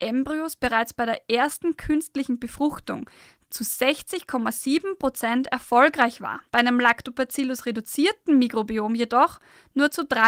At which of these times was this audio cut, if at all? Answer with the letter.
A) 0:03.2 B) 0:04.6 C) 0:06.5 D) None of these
C